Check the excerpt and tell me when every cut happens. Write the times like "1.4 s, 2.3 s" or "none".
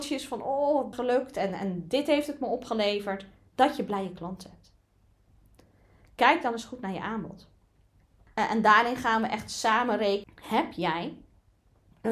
0.9 s, 8.3 s, 10.2 s